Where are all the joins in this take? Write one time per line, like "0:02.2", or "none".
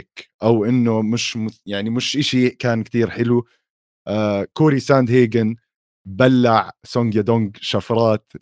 none